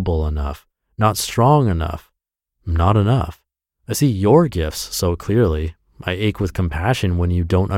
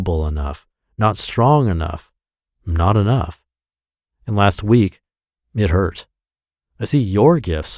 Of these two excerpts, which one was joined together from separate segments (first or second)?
first